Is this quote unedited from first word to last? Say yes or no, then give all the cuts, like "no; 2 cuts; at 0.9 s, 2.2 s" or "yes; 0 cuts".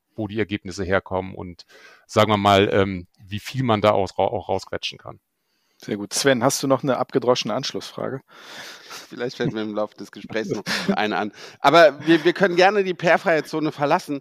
no; 2 cuts; at 9.0 s, 10.9 s